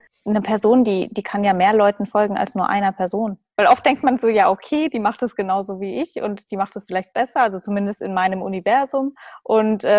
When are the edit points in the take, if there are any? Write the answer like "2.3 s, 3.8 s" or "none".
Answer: 3.5 s